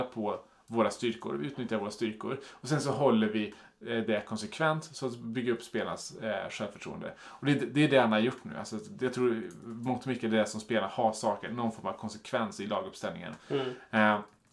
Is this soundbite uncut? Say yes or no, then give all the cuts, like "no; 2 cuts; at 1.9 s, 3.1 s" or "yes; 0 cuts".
yes; 0 cuts